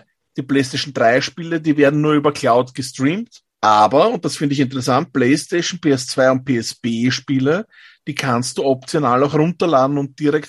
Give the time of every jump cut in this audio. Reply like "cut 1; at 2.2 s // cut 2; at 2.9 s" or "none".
cut 1; at 3.6 s